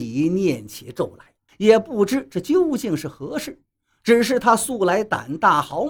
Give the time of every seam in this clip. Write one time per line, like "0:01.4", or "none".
0:01.5